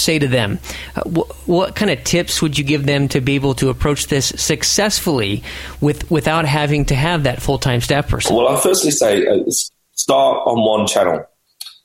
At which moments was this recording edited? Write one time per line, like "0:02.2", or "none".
none